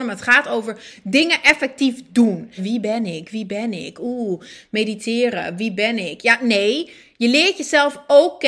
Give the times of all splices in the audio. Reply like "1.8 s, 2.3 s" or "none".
2.6 s

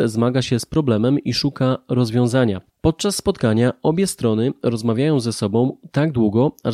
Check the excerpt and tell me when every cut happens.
2.7 s

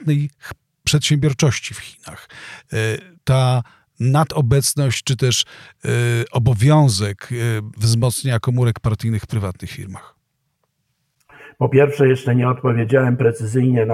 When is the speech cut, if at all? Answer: 3.2 s

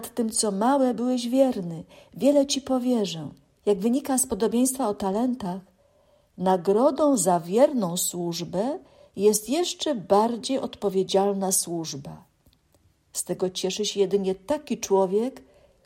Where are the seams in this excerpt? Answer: 3.6 s

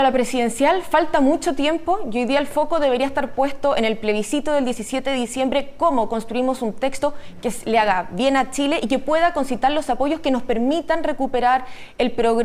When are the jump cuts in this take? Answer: none

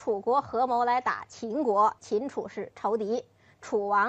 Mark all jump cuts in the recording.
2.0 s

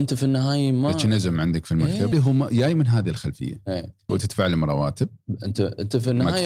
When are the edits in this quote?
2.1 s, 4.1 s

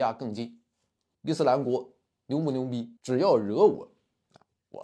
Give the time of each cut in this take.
1.1 s, 3.0 s

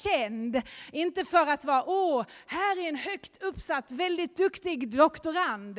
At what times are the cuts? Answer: none

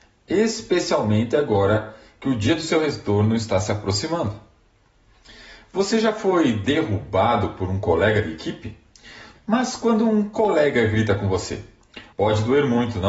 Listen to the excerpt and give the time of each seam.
9.4 s, 12.1 s

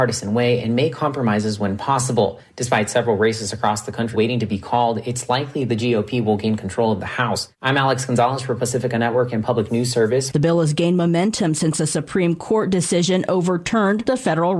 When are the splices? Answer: 4.1 s, 10.3 s

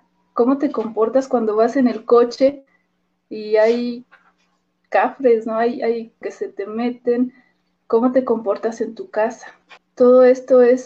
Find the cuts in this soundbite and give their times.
6.2 s, 7.8 s, 9.8 s

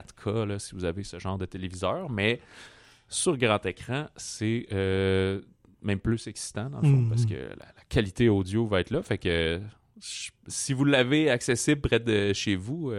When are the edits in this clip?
none

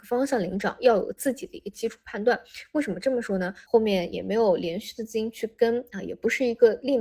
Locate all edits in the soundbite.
3.7 s

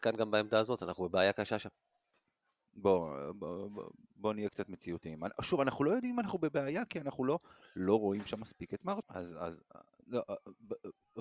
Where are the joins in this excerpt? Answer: 9.0 s

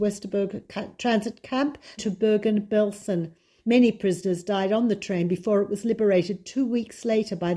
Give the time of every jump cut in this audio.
2.0 s, 3.6 s

